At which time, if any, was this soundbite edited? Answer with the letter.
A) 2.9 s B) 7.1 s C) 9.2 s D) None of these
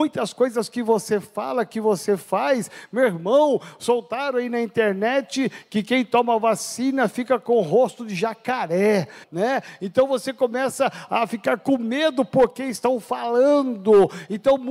C